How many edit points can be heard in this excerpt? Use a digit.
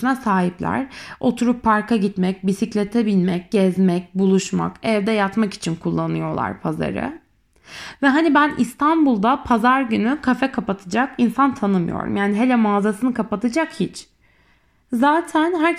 0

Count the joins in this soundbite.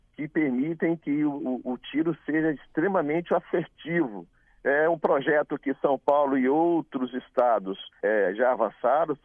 2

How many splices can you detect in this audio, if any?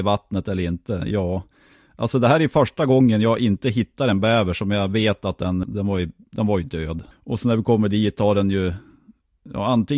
2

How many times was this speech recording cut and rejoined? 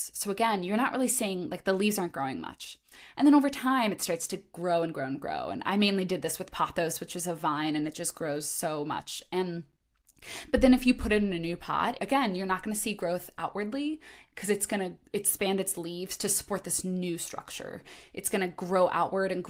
1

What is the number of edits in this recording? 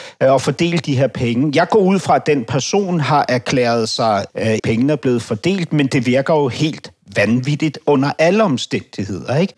1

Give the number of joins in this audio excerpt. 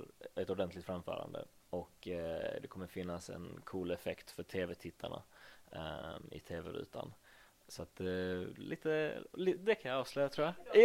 1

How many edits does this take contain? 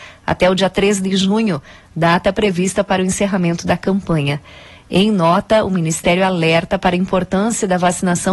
0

